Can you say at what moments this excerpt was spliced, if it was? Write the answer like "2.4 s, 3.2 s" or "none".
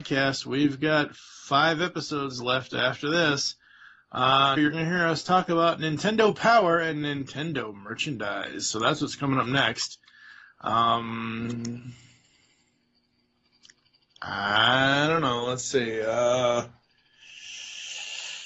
4.6 s